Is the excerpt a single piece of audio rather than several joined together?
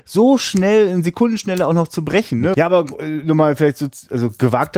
no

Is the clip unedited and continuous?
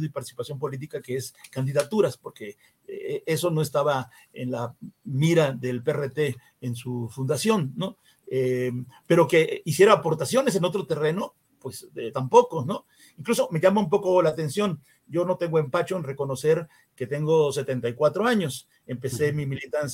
yes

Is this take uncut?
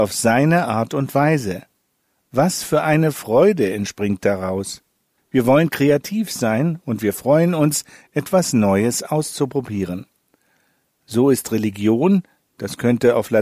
no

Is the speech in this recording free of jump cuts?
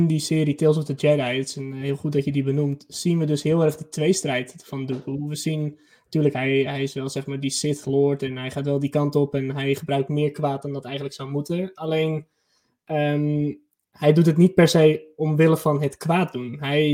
yes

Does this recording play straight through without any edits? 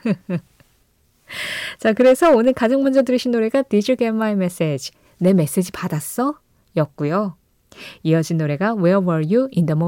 yes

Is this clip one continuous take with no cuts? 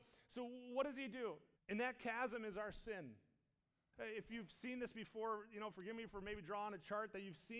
no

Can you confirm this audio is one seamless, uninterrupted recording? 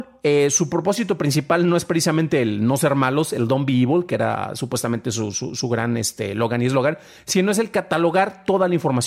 yes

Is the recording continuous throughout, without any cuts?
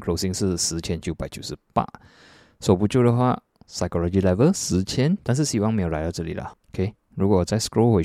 no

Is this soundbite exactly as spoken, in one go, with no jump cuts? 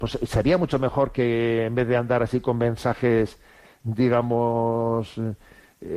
yes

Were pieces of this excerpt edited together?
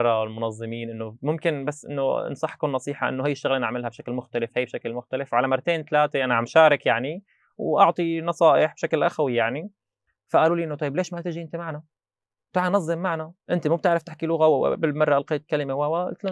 yes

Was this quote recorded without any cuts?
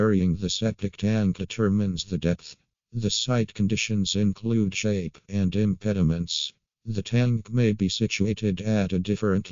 no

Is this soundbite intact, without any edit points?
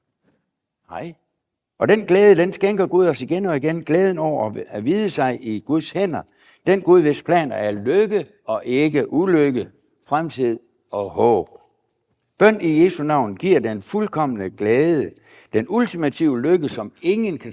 no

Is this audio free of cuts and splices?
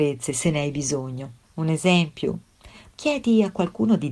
no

